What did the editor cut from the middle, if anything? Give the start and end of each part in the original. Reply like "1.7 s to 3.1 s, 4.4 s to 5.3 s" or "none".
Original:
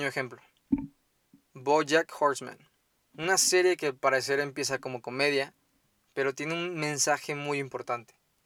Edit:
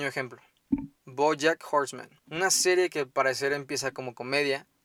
1.0 s to 1.4 s, 2.7 s to 3.1 s

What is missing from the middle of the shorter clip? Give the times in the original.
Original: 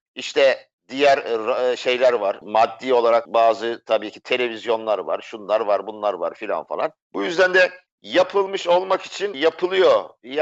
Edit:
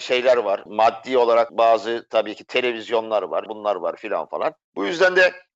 5.2 s to 5.8 s

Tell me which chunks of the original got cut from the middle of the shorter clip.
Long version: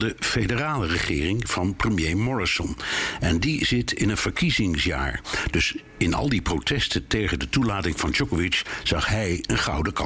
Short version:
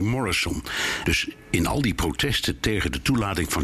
3.2 s to 5.5 s

